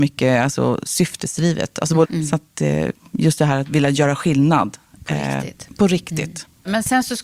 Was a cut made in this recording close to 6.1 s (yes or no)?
no